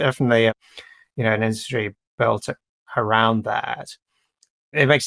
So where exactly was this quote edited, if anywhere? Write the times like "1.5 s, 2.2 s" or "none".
none

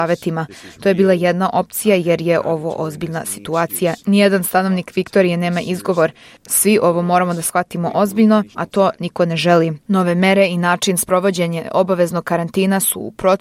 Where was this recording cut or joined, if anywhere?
8.5 s, 9.8 s

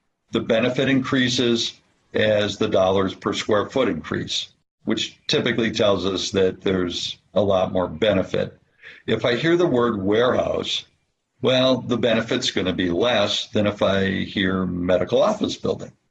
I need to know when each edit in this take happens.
none

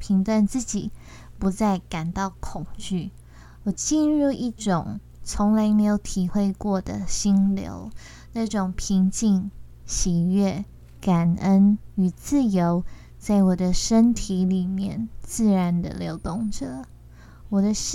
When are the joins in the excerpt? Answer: none

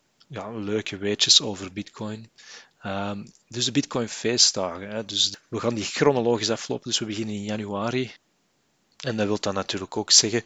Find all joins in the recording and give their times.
none

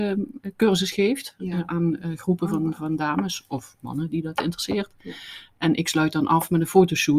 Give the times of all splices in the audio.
none

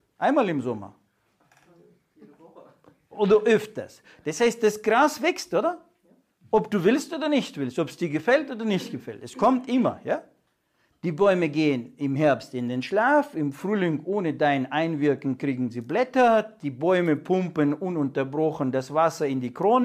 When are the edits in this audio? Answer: 10.9 s

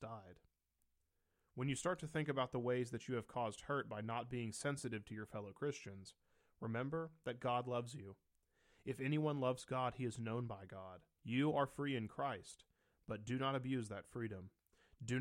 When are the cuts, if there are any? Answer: 11.2 s

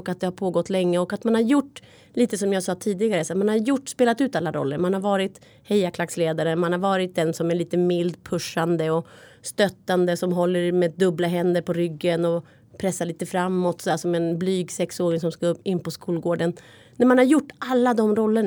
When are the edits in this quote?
none

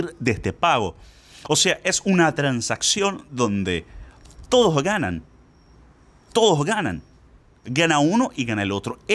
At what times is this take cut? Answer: none

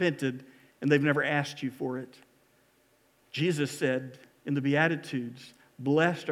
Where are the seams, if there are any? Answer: 3.2 s

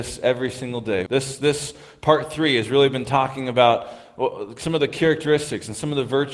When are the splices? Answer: 1.1 s

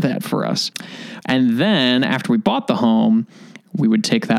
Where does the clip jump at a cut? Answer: 1.2 s

